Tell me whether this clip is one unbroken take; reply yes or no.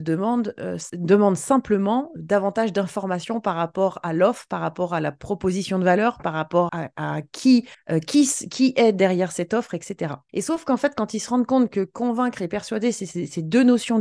no